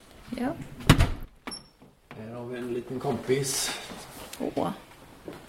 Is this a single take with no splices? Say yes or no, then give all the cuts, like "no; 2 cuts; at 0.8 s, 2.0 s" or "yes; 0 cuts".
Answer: yes; 0 cuts